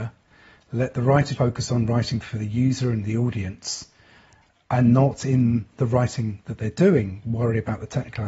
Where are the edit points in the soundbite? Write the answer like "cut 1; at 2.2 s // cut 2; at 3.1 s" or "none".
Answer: cut 1; at 1.4 s